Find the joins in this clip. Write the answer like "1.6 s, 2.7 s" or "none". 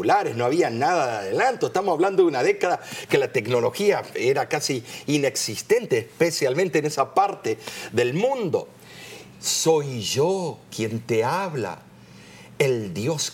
9.3 s